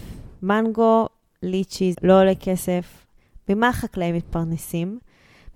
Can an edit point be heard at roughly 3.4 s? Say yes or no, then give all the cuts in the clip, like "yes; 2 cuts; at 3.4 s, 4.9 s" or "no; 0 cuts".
no; 1 cut; at 1.9 s